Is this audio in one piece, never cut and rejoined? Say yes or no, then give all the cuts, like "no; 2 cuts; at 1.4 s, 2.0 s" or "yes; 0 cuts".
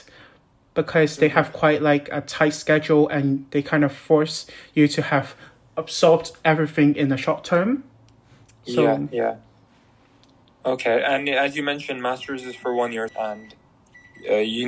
no; 1 cut; at 13.1 s